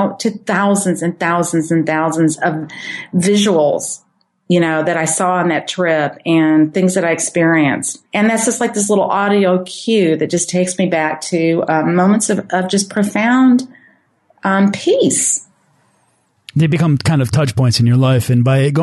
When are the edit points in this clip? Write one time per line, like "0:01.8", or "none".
0:08.1